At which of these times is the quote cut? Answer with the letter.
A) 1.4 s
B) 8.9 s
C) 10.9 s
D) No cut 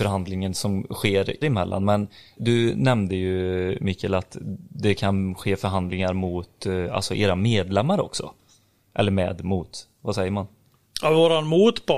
A